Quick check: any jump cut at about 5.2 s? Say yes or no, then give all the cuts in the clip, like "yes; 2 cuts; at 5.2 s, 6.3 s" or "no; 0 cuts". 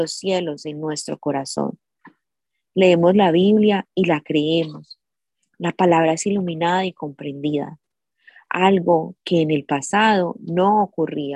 no; 0 cuts